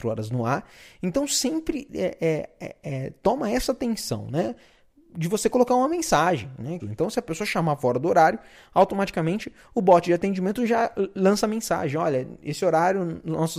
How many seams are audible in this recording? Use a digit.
1